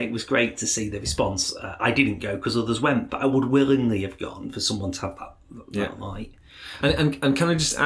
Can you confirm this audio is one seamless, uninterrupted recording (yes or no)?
no